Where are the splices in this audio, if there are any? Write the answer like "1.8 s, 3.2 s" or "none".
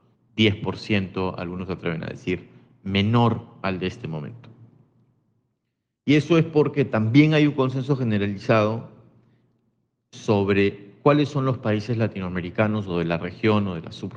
none